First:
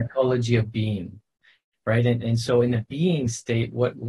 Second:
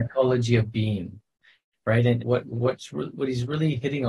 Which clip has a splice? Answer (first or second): second